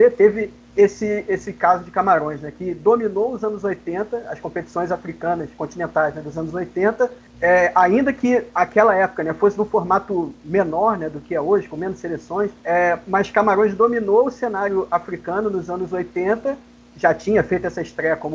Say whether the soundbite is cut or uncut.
uncut